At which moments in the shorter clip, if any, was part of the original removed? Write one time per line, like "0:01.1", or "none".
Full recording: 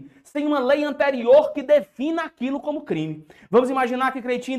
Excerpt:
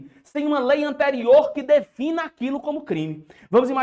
none